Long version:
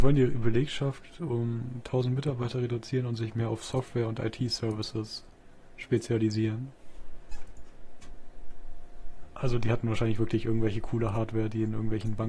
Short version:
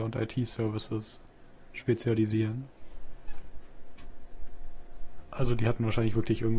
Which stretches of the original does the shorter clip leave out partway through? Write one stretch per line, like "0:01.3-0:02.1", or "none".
none